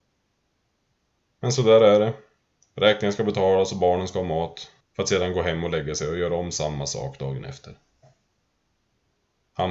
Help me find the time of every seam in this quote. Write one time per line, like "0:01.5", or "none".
0:04.8